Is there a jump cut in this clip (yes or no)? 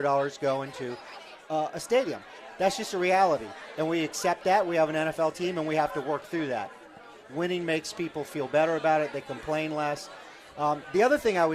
no